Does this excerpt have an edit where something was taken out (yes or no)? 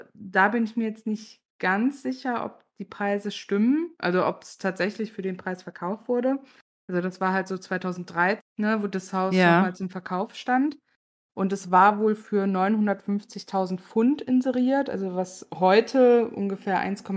yes